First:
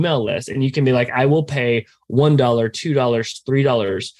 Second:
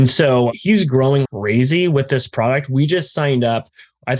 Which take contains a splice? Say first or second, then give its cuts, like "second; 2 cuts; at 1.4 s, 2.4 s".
second; 1 cut; at 1.2 s